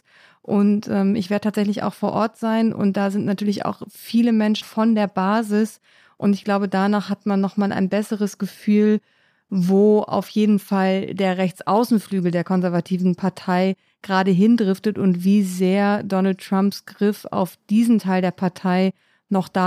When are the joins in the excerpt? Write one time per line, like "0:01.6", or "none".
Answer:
0:04.6